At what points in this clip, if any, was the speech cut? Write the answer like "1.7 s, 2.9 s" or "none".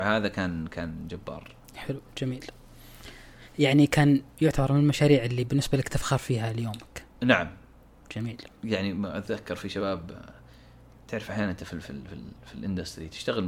none

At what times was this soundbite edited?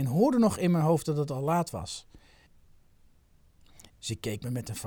3.9 s

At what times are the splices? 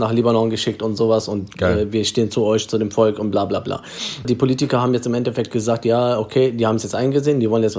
4.2 s

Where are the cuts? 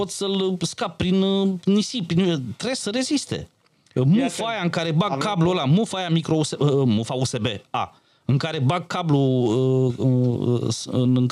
none

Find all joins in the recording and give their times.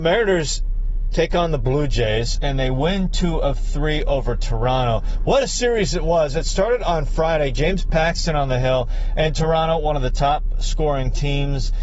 none

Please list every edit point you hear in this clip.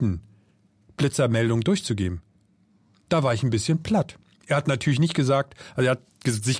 none

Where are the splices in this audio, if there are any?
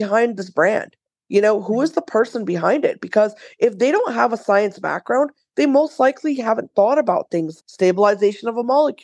7.6 s

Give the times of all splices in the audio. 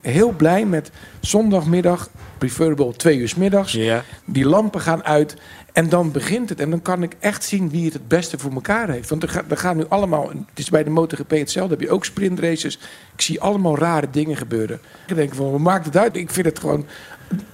15.1 s, 16.1 s

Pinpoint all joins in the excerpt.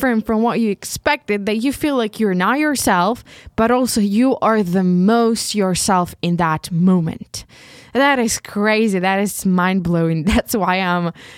none

